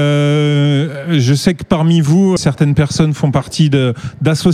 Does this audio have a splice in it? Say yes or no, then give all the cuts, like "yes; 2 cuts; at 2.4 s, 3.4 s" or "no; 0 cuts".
yes; 1 cut; at 2.4 s